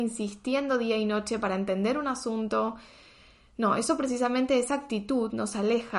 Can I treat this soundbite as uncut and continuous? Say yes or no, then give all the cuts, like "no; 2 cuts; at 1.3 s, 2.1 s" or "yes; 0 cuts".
yes; 0 cuts